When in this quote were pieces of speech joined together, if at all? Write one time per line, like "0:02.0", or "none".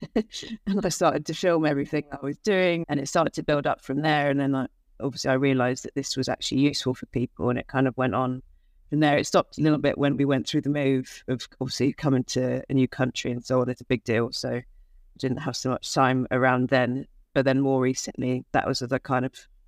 0:02.8